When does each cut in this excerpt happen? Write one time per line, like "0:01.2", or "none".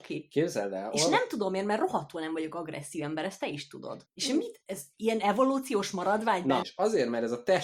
0:04.1
0:06.6